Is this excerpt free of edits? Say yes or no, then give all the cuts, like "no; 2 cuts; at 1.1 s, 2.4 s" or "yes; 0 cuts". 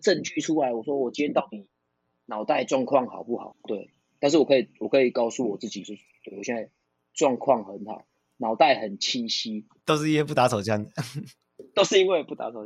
yes; 0 cuts